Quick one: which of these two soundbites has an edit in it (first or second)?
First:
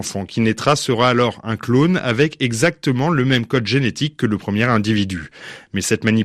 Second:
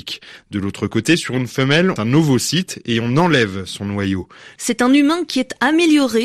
second